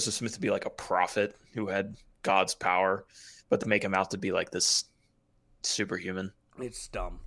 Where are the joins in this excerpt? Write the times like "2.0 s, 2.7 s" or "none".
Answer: 3.6 s